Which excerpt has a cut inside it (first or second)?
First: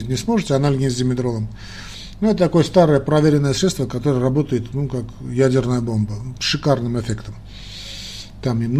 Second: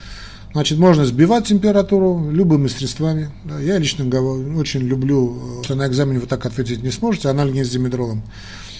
second